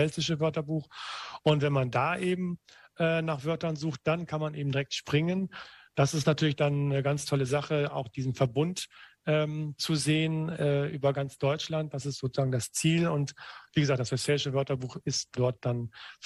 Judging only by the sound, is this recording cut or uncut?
uncut